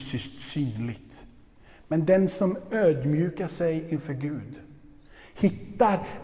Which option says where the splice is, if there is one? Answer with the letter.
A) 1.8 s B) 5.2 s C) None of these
C